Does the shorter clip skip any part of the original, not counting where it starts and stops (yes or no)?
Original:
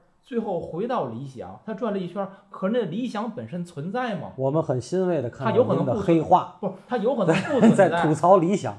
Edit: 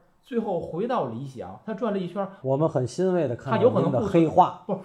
yes